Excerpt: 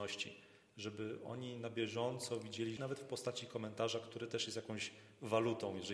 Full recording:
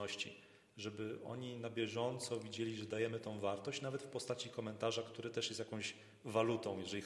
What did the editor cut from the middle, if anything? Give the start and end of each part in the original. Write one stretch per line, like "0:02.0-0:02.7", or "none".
0:02.8-0:03.8